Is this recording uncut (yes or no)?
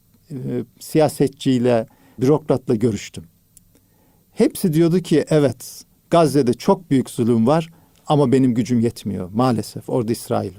no